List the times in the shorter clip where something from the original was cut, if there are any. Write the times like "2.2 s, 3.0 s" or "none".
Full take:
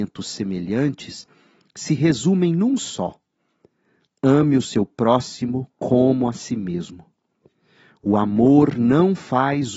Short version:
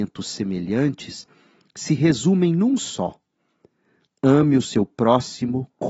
none